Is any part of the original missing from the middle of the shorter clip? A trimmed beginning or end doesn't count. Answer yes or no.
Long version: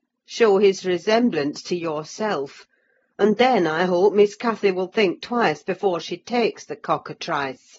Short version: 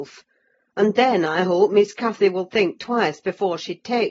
no